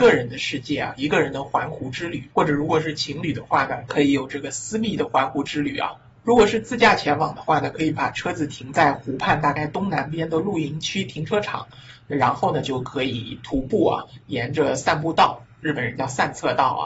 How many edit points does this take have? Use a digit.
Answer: 1